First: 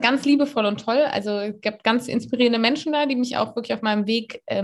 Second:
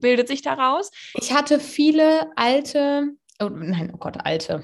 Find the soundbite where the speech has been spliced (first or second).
second